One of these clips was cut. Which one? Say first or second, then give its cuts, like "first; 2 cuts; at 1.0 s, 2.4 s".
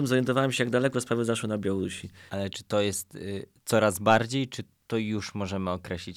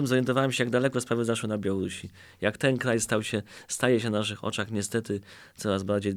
first; 1 cut; at 2.3 s